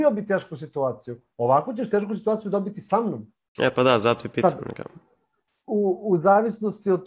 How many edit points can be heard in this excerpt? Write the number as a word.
one